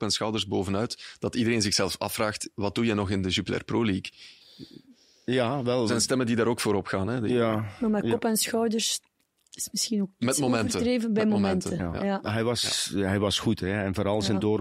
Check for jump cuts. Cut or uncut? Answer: uncut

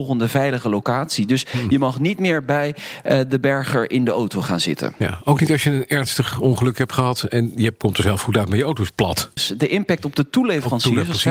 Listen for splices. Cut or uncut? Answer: cut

